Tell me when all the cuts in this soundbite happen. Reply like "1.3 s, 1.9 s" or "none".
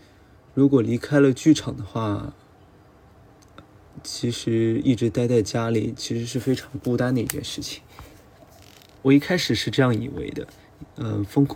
9.0 s